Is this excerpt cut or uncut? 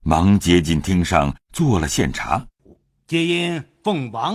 cut